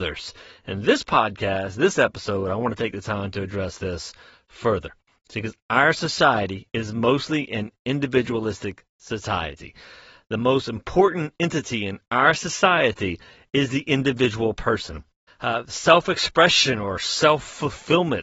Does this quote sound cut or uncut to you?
cut